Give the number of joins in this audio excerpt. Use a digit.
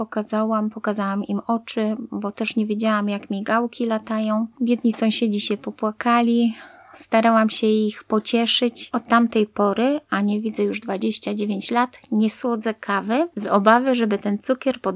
1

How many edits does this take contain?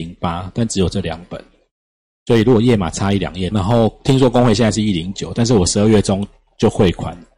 1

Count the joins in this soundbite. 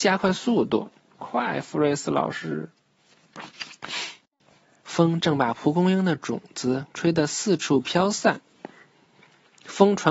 2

